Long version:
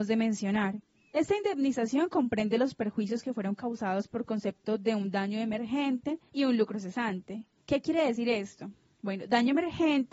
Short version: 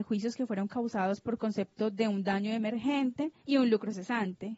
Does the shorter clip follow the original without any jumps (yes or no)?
yes